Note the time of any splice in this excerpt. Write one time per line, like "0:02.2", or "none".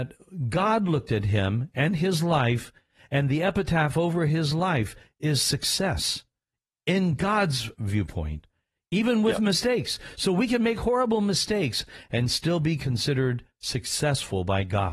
none